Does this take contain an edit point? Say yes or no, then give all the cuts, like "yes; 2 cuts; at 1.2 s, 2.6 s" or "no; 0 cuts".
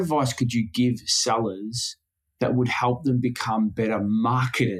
no; 0 cuts